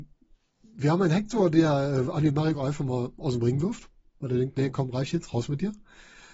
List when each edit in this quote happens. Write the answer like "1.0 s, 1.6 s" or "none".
none